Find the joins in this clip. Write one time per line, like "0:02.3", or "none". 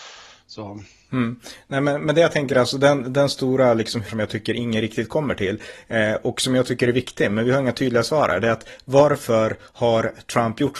0:04.1